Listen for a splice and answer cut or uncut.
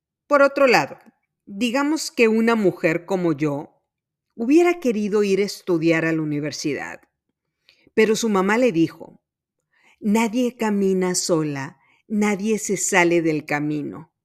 uncut